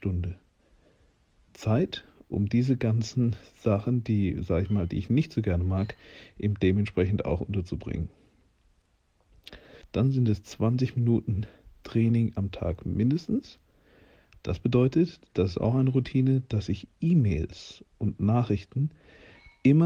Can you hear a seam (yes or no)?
yes